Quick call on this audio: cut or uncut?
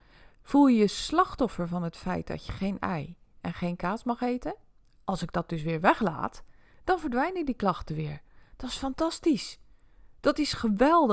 cut